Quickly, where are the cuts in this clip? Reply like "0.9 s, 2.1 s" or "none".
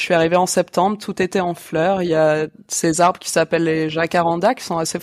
none